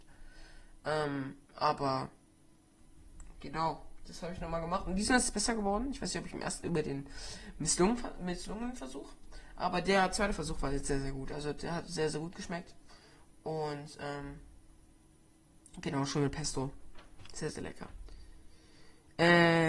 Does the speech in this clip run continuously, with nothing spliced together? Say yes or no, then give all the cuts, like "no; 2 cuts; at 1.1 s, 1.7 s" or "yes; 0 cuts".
no; 1 cut; at 6.6 s